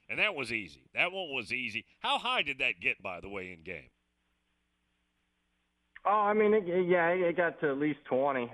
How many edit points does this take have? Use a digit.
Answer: 0